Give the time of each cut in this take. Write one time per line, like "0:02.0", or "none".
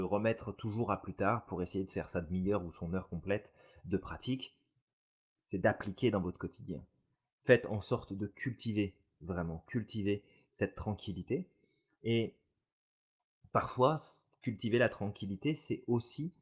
none